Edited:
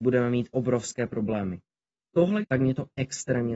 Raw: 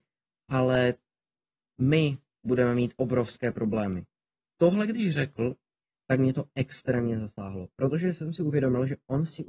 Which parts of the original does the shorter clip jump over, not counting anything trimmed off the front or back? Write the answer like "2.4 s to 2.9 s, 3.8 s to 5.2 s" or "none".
4.9 s to 6.0 s